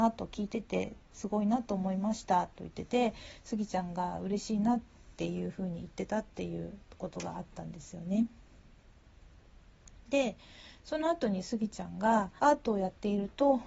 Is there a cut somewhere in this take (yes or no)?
yes